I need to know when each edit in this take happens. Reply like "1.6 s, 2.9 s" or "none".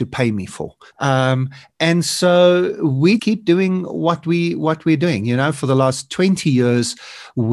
0.9 s, 3.2 s